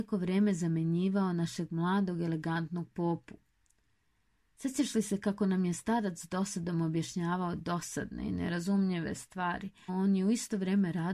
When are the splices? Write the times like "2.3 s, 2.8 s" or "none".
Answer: 9.9 s